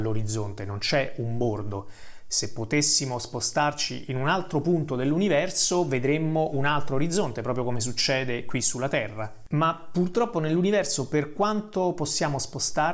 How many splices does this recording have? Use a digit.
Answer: 0